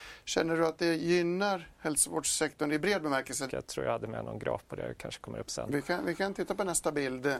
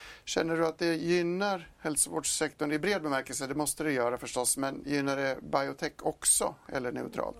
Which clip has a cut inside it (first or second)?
first